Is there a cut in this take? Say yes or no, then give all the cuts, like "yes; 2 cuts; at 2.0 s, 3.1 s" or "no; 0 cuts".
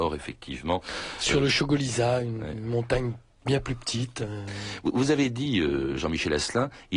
no; 0 cuts